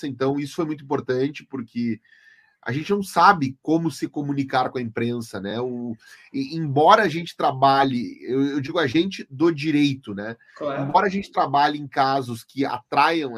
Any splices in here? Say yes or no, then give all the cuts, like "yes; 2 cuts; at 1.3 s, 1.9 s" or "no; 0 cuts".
no; 0 cuts